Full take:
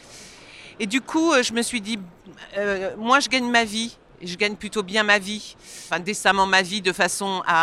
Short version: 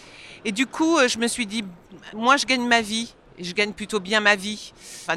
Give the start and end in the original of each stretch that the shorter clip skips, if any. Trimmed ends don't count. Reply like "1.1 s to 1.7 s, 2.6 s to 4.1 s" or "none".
2.5 s to 3.0 s